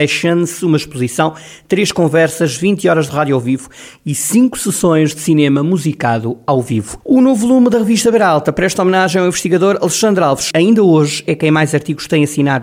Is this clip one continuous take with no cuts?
no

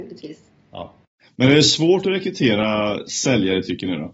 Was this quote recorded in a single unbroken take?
yes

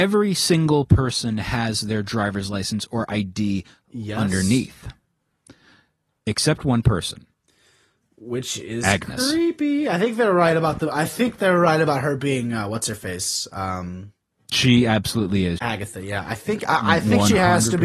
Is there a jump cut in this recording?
yes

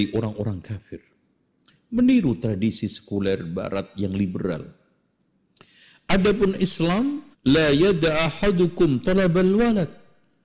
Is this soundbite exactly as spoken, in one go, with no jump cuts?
no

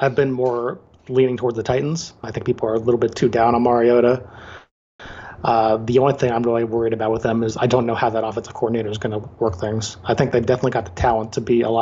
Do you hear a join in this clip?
yes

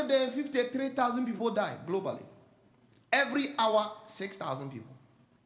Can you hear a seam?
no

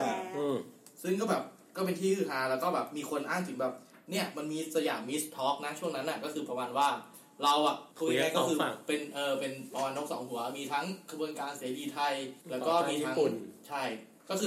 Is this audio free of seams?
no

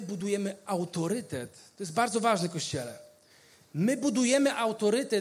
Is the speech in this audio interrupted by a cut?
no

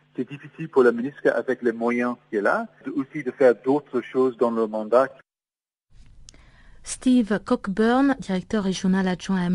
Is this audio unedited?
yes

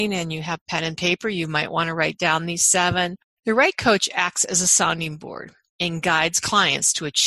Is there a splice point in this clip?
yes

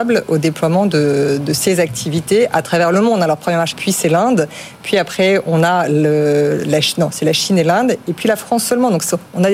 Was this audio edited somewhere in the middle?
yes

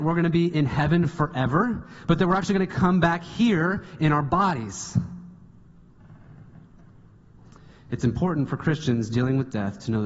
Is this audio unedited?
yes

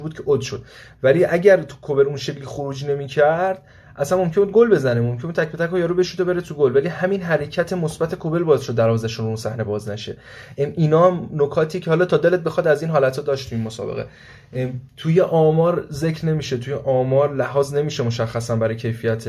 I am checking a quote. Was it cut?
no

